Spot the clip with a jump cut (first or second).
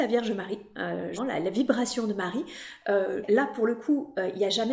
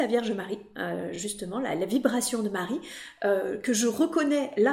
first